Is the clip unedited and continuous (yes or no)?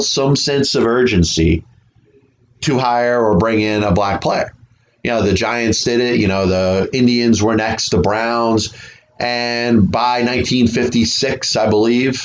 yes